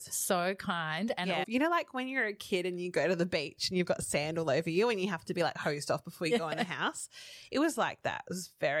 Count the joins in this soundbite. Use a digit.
1